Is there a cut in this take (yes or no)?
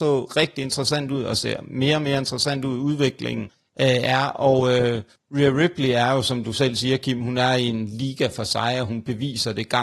no